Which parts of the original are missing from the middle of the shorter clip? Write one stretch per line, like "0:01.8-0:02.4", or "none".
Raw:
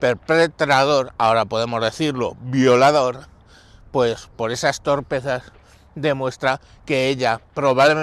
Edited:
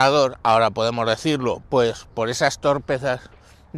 0:02.4-0:03.8